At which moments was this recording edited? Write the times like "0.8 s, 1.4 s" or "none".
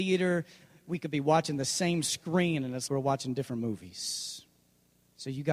2.9 s

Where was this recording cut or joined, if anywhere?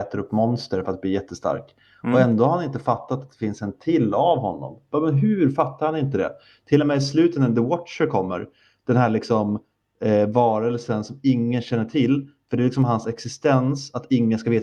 none

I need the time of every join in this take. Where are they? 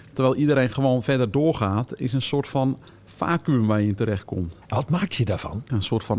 4.6 s

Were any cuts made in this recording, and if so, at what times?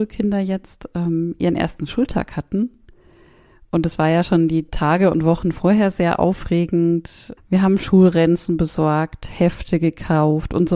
7.4 s

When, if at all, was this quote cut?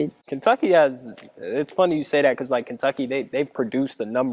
none

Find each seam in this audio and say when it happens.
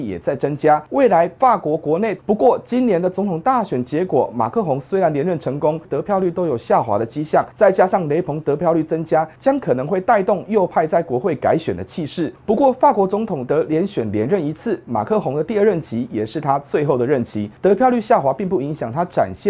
2.2 s, 5.8 s, 12.4 s

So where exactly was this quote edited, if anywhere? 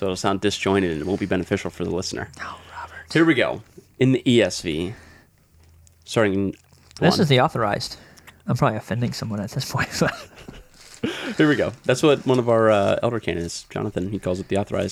7.0 s

